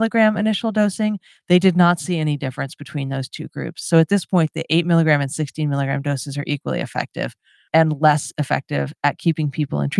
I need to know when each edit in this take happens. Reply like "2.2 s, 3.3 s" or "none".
none